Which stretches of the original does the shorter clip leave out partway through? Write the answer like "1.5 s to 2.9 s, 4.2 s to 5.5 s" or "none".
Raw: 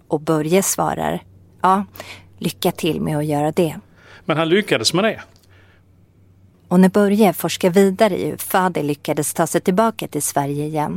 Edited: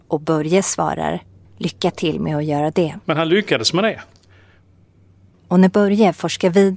1.4 s to 2.3 s, 3.8 s to 4.2 s